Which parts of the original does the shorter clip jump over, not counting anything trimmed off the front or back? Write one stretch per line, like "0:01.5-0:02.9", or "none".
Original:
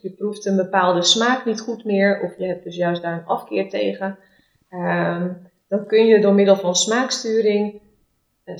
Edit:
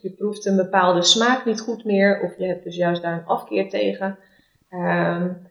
none